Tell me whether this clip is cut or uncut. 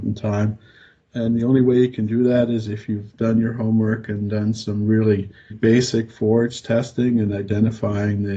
cut